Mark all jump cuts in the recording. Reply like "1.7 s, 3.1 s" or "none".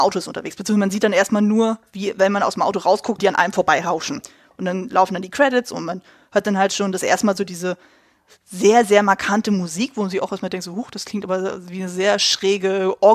3.2 s

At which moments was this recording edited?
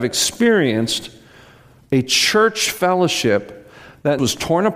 none

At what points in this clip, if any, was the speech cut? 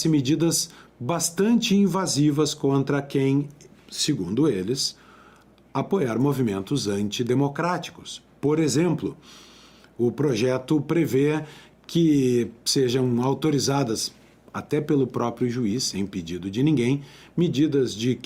none

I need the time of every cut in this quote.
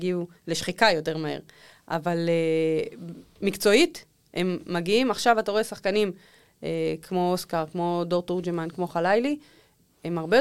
none

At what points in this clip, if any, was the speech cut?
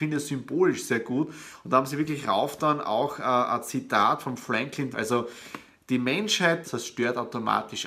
4.9 s, 6.6 s

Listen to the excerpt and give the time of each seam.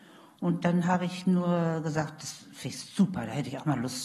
none

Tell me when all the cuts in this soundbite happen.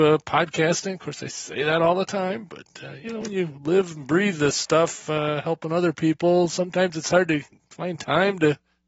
none

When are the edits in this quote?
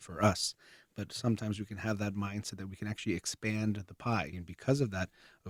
4.3 s

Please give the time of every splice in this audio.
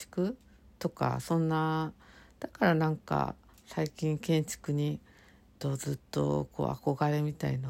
5.6 s

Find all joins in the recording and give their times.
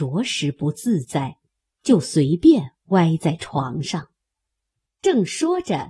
4.9 s

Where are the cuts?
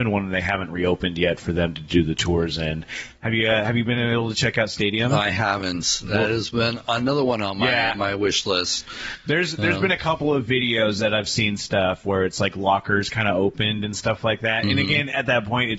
none

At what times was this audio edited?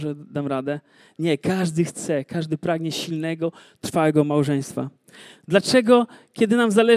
5.4 s

